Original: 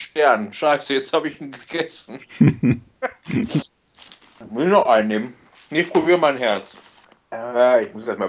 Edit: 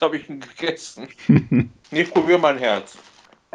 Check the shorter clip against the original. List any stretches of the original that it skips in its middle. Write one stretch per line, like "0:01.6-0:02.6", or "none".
0:03.0-0:05.6